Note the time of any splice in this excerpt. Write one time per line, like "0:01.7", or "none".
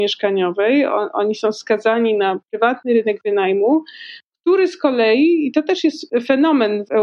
none